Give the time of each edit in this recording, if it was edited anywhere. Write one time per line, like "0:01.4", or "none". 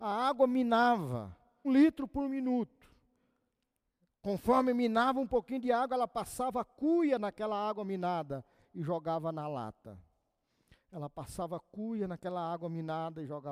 0:01.6